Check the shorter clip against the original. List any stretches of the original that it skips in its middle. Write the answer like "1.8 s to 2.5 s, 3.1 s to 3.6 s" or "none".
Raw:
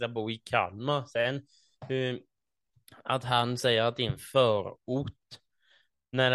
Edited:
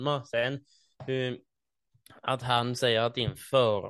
none